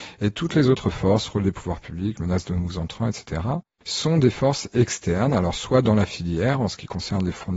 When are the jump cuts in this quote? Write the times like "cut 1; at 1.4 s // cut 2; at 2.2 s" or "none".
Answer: none